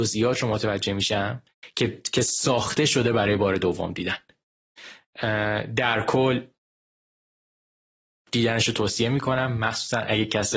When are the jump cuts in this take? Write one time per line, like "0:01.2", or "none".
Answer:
0:01.7